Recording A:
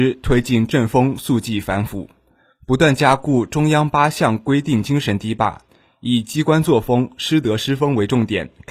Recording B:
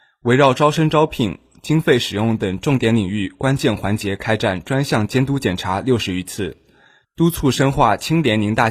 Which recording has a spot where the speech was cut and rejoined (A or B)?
B